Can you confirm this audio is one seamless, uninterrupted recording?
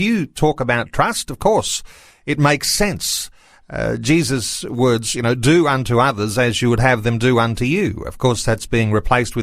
yes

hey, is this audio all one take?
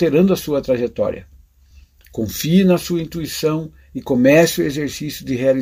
yes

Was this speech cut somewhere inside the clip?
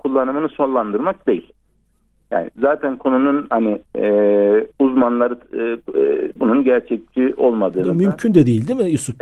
yes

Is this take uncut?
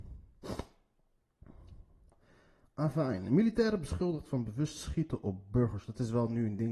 yes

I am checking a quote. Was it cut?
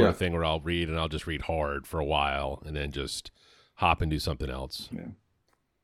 yes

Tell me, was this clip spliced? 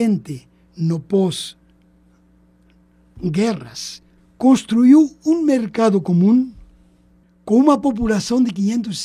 yes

